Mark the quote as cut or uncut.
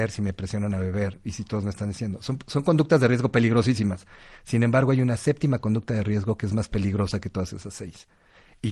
uncut